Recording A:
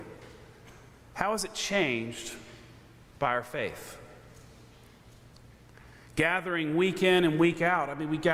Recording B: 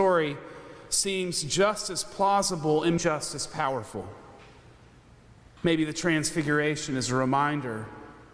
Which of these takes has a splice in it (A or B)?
B